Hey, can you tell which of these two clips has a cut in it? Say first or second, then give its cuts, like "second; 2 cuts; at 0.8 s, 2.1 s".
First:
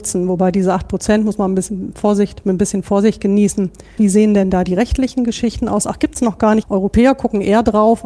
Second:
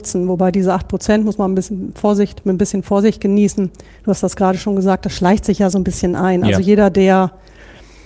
first; 2 cuts; at 4.0 s, 6.6 s